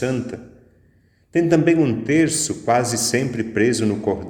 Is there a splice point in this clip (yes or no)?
no